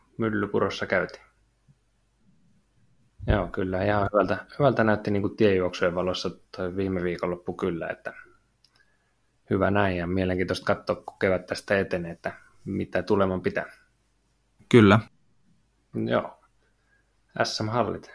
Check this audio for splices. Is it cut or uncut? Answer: cut